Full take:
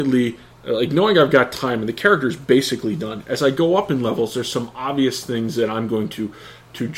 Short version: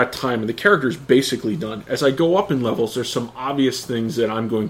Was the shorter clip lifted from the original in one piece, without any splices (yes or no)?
yes